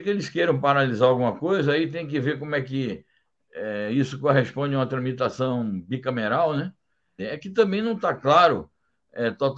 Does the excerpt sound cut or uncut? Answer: cut